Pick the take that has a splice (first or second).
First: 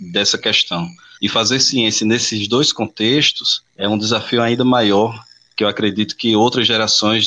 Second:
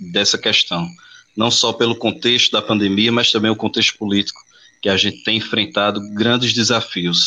first